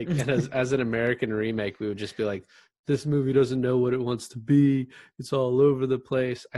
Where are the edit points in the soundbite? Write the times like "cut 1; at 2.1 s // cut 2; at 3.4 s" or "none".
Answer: none